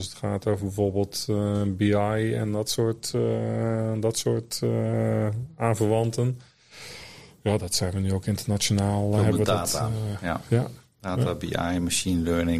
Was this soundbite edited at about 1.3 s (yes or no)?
no